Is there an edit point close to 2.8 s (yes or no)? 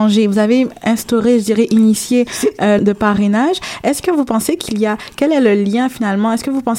yes